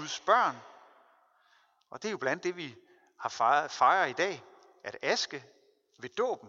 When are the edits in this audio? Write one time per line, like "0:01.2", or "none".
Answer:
none